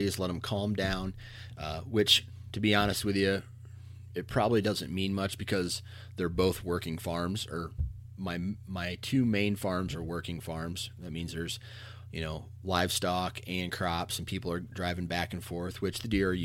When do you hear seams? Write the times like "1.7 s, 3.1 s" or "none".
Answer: none